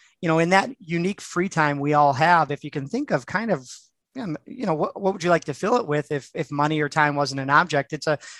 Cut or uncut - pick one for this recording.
uncut